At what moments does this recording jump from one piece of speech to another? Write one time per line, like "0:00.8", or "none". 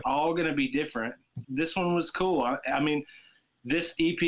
0:01.4